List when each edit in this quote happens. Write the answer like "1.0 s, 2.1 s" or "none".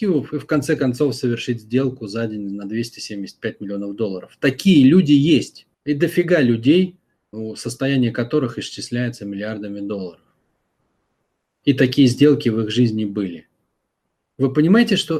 5.7 s, 7.3 s